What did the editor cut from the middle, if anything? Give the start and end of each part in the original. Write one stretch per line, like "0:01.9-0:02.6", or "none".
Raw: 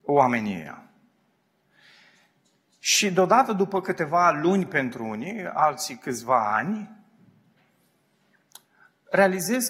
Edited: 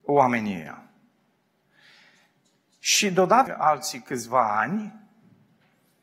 0:03.5-0:05.4